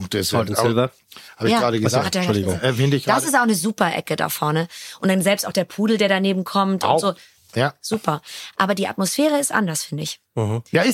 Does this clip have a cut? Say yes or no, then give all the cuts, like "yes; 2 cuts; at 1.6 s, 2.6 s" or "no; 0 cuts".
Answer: no; 0 cuts